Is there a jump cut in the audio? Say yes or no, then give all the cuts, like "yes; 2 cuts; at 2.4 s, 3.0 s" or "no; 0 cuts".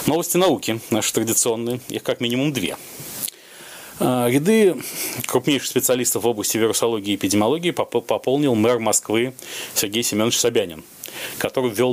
no; 0 cuts